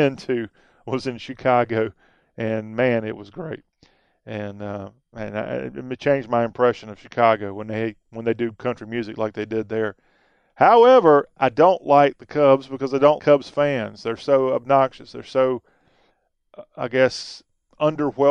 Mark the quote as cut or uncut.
cut